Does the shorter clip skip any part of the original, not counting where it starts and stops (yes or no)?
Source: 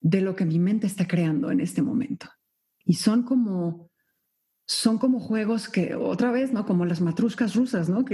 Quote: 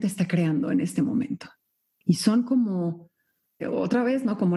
yes